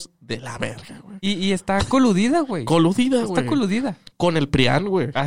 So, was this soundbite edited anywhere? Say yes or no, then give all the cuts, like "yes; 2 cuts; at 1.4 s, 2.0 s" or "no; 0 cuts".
no; 0 cuts